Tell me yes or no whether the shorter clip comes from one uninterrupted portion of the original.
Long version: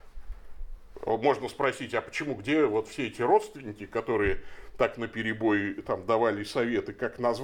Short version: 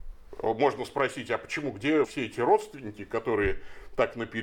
no